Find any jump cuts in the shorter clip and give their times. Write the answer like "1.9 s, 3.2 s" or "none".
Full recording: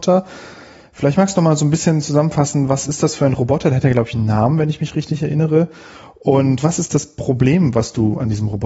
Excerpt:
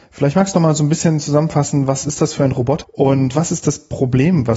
2.8 s